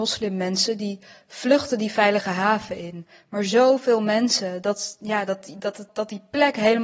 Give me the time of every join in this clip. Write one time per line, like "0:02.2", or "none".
0:05.9